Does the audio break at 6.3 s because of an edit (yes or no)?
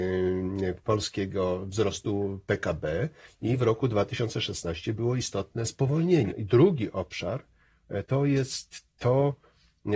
yes